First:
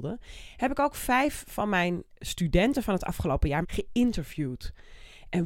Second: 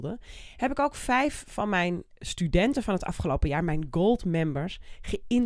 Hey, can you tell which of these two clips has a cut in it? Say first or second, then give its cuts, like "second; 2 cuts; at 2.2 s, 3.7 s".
first; 1 cut; at 3.6 s